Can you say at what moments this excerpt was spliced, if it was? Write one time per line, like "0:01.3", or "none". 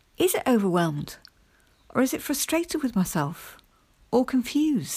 none